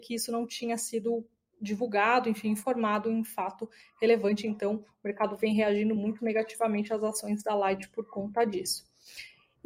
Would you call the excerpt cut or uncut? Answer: uncut